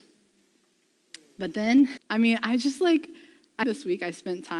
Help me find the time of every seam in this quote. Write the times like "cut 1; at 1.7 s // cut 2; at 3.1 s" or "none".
cut 1; at 2.0 s // cut 2; at 3.6 s